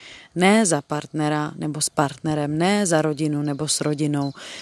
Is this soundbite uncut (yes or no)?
yes